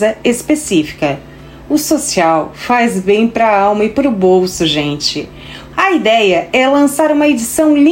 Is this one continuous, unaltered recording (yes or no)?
no